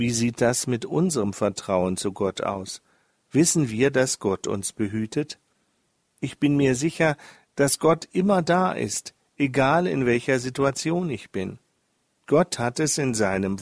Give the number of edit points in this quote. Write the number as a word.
zero